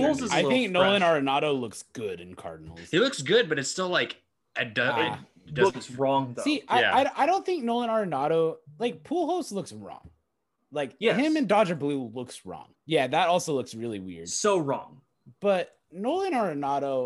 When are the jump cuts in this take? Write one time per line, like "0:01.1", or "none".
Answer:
0:12.7